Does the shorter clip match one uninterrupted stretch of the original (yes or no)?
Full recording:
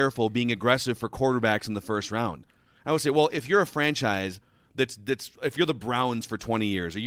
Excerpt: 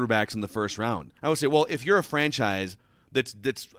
no